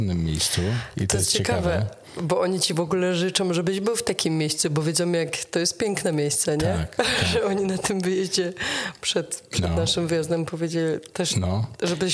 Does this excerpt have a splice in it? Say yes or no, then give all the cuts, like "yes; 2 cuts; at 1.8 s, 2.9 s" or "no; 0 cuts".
no; 0 cuts